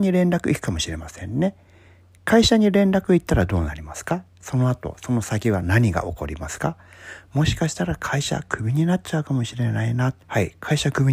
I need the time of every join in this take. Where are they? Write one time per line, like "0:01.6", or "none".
0:10.2